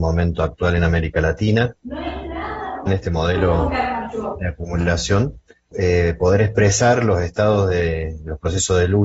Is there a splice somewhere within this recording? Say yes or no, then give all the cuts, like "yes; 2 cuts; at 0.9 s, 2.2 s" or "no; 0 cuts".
yes; 2 cuts; at 2.9 s, 5.7 s